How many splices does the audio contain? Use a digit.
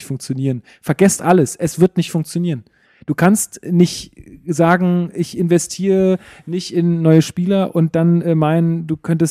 0